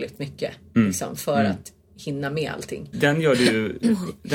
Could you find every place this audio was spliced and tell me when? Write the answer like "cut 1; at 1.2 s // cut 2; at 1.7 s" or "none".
cut 1; at 2.9 s